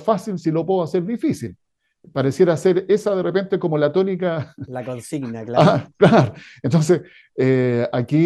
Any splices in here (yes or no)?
no